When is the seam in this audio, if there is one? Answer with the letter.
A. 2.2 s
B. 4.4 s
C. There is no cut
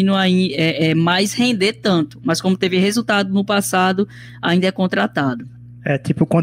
C